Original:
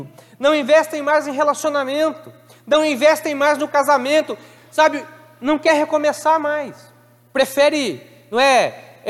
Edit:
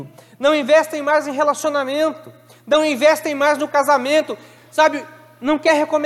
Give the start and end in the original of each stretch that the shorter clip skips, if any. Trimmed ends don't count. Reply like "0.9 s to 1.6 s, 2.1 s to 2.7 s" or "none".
none